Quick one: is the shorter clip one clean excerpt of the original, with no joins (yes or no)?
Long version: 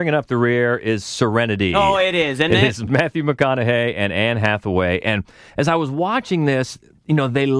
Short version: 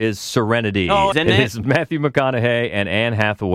no